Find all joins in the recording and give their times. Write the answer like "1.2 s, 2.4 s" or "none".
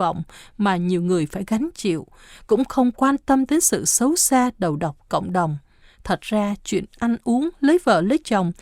5.8 s